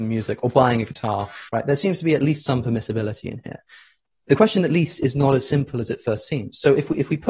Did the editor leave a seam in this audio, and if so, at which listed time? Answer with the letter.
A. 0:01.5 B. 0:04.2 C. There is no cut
A